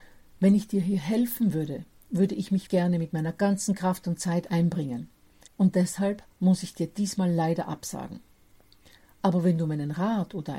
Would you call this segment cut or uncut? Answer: cut